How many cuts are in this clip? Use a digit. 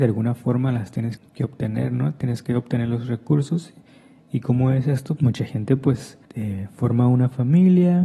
3